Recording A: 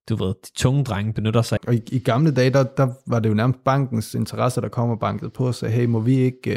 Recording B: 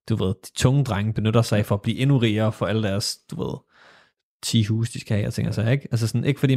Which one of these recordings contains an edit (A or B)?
A